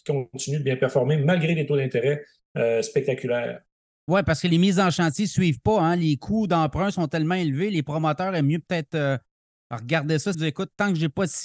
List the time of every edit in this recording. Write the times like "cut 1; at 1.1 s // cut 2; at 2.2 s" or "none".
cut 1; at 10.3 s